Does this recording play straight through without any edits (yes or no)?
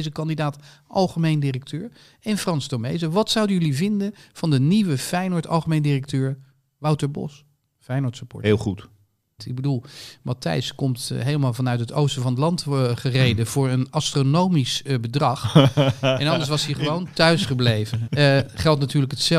no